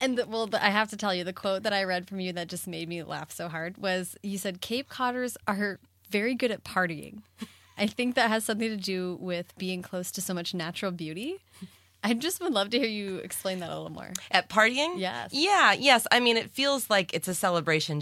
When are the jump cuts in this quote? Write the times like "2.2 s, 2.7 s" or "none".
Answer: 5.4 s